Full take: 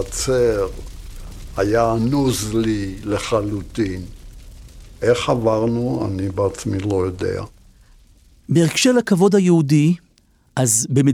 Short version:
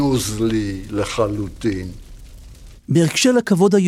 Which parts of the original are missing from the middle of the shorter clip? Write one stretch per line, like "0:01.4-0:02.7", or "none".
0:04.9-0:08.4